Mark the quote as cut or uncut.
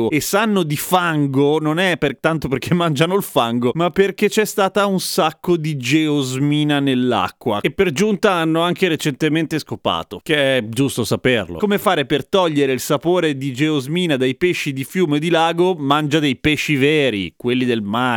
uncut